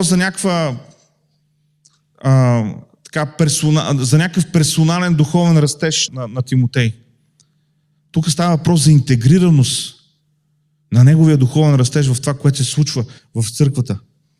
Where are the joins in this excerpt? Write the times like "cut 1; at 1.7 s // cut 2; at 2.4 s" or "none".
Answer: cut 1; at 6.1 s